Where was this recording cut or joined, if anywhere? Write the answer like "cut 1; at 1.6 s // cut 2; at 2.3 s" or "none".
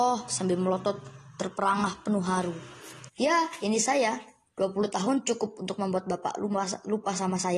cut 1; at 3.1 s